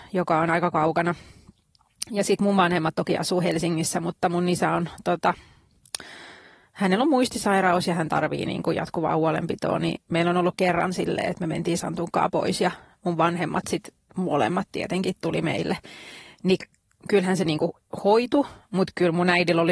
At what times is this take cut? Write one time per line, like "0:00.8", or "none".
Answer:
none